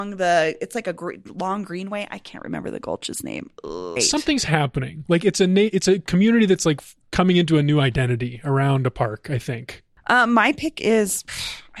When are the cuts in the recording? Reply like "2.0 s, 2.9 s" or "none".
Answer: 4.0 s